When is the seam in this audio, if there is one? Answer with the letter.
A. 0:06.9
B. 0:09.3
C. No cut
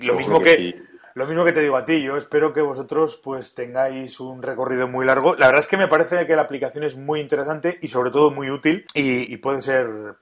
B